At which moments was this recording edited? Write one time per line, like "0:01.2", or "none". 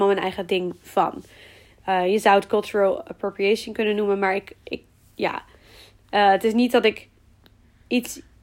none